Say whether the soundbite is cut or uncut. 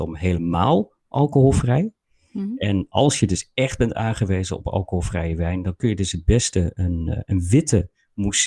uncut